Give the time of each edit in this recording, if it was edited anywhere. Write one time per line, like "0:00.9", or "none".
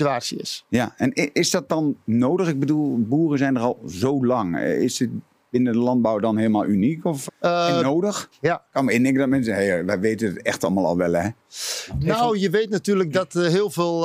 0:07.3
0:08.3